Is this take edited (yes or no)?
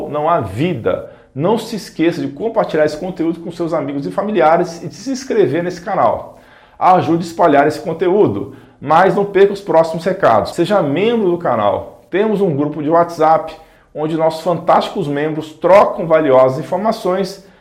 yes